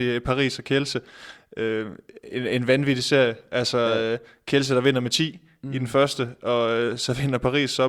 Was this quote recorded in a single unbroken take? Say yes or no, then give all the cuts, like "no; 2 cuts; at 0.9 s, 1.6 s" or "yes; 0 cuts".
yes; 0 cuts